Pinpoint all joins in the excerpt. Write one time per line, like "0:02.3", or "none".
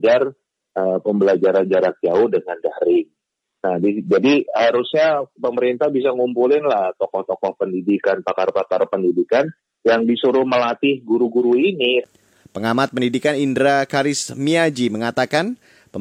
0:12.4

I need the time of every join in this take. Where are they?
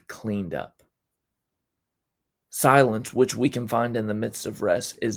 none

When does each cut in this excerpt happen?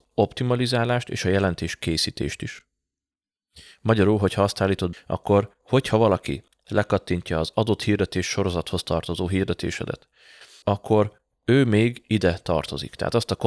0:04.9
0:10.6

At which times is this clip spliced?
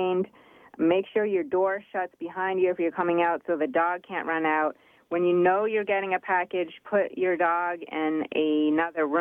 none

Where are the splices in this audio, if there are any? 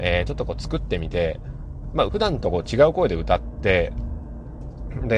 0:02.1

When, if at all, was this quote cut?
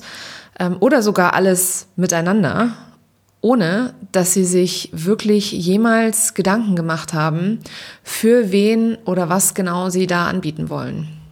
none

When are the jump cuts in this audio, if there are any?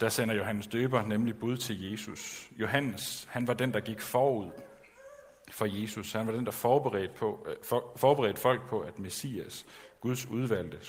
none

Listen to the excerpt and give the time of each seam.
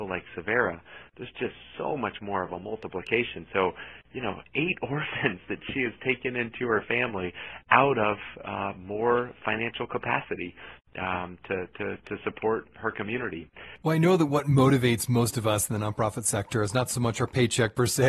none

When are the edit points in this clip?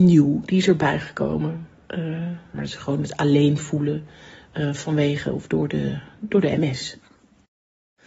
0:02.5

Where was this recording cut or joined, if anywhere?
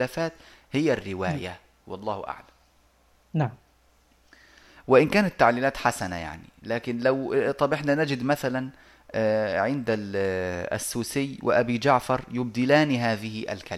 none

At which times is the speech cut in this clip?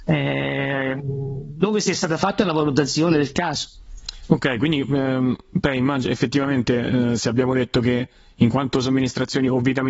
none

